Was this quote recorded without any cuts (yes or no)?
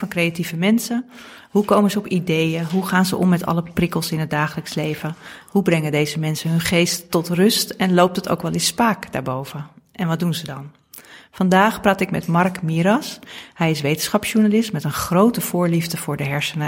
yes